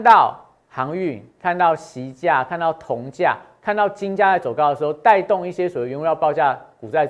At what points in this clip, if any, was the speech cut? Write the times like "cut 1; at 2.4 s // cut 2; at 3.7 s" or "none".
none